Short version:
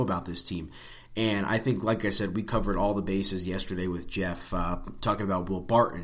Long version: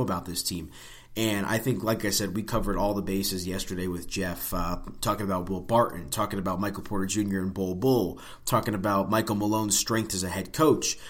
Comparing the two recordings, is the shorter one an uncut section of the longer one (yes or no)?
yes